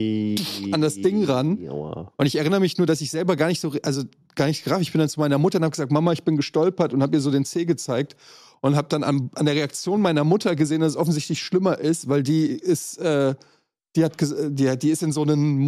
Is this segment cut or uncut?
uncut